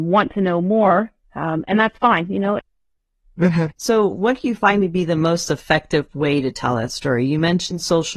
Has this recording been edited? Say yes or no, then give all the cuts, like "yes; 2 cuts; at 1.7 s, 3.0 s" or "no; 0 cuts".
yes; 2 cuts; at 2.6 s, 3.8 s